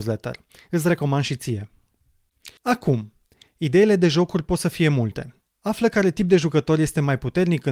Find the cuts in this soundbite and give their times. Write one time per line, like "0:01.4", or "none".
0:02.6
0:05.4